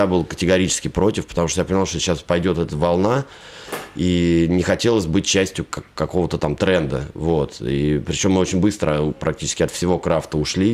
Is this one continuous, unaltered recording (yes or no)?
yes